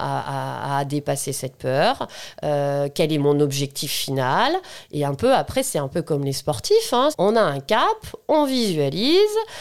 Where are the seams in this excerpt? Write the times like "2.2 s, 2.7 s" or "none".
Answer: 7.1 s